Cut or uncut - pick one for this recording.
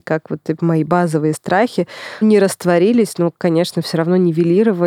cut